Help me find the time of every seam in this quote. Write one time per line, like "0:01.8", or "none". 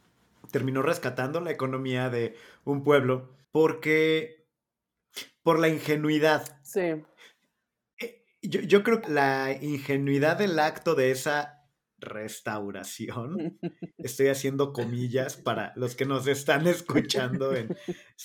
0:03.4
0:09.0